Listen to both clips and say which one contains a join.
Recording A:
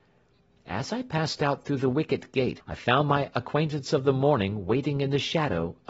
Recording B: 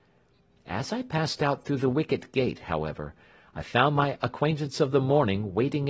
A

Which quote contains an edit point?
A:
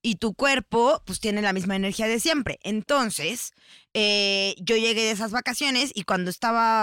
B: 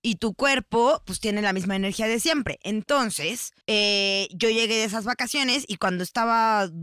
B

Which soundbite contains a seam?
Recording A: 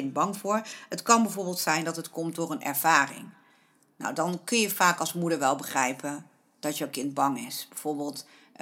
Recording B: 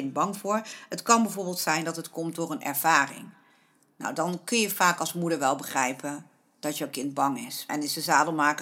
B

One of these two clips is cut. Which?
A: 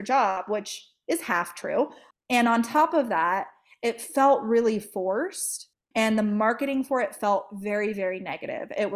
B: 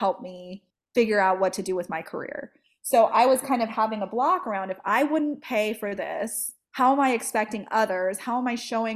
A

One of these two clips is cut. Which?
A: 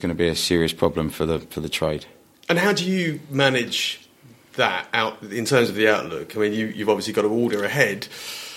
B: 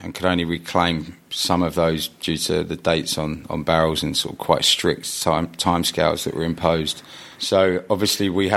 B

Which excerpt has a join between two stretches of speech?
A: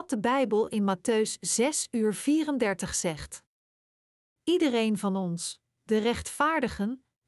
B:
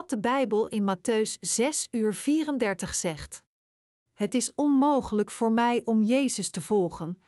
B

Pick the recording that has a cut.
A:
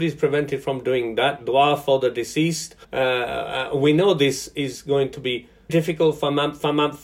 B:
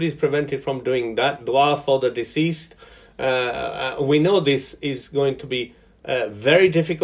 A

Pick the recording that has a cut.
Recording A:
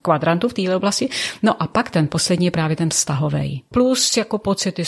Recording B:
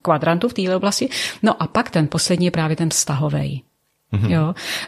A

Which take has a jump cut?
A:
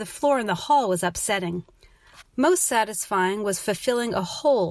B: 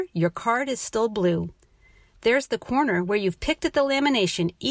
A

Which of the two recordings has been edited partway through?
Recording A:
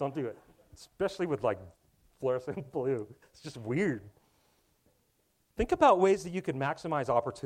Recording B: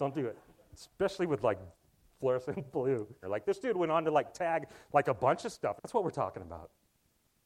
B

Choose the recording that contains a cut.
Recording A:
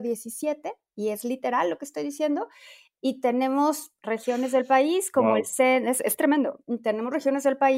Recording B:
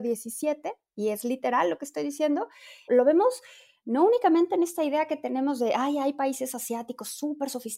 B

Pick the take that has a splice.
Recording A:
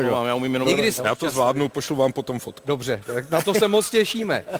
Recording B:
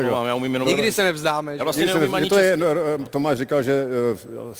A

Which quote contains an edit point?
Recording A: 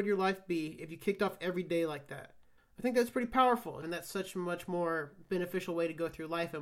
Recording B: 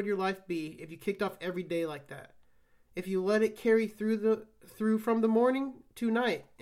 A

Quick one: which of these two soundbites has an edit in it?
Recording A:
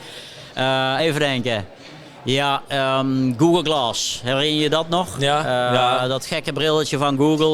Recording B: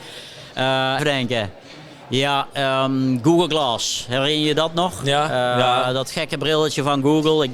B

